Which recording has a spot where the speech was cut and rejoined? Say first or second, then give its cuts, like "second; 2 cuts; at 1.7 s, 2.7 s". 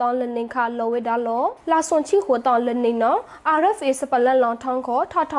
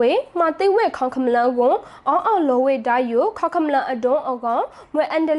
first; 1 cut; at 1.6 s